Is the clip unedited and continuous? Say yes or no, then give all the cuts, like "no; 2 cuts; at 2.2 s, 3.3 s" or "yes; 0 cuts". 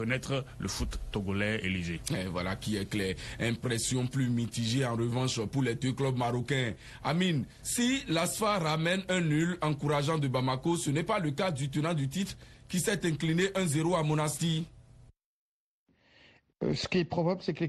yes; 0 cuts